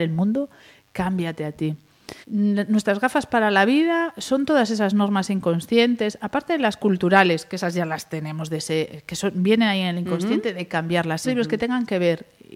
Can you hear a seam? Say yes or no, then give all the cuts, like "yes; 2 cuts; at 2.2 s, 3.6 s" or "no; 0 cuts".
yes; 2 cuts; at 2.2 s, 11.2 s